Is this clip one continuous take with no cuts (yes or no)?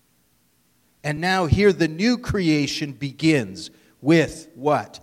yes